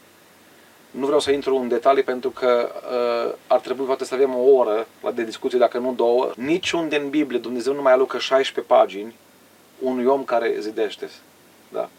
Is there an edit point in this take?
yes; 1 cut; at 6.3 s

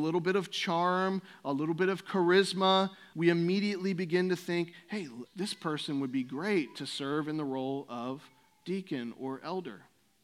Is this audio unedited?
no; 2 cuts; at 3.1 s, 5.3 s

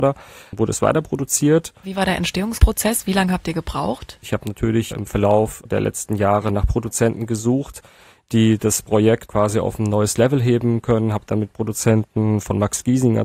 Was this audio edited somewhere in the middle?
yes; 2 cuts; at 1.8 s, 4.2 s

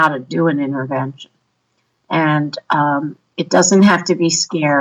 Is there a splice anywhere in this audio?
no; 0 cuts

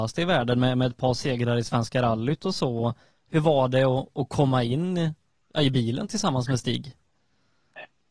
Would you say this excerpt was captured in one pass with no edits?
yes; 0 cuts

